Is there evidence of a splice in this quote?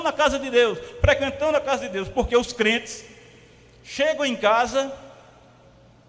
no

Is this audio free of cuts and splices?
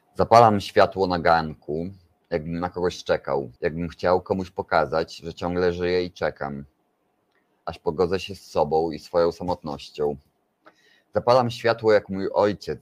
no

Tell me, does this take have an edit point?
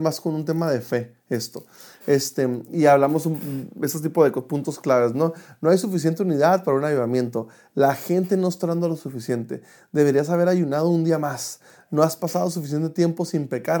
no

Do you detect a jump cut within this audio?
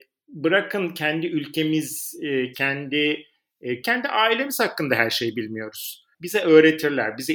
yes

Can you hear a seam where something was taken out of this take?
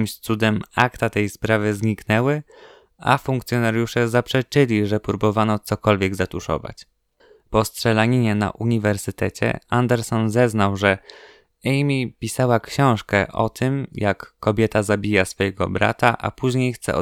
no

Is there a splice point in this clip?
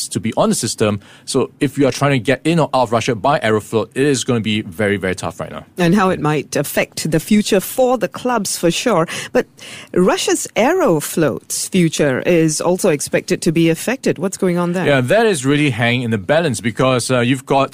yes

